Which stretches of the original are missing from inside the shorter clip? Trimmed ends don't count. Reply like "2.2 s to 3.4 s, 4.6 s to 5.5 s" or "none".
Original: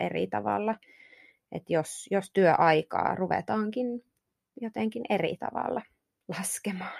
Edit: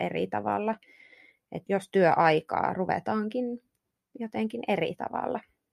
1.7 s to 2.1 s

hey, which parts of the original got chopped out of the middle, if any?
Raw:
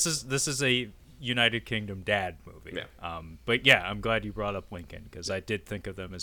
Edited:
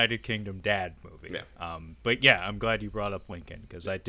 none

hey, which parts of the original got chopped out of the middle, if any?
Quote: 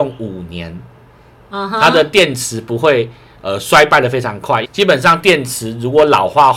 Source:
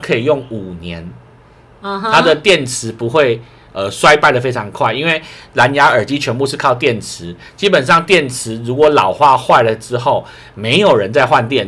5.0 s to 7.5 s

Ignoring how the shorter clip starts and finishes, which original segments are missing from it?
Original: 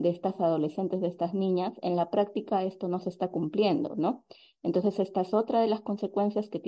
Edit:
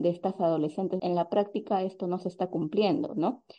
1.0 s to 1.8 s

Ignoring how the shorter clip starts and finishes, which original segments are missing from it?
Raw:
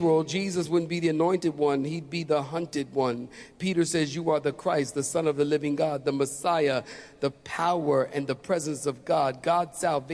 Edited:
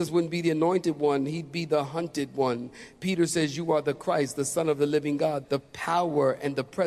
6.0 s to 7.2 s

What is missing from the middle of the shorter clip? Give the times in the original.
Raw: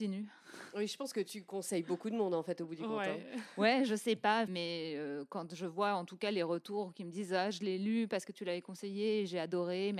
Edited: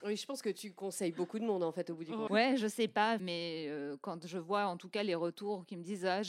3.0 s to 3.6 s

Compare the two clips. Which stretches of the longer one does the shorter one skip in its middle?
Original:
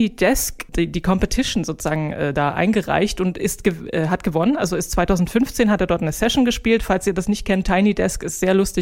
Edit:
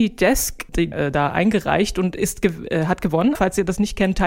0.9 s to 2.1 s, 4.6 s to 6.8 s

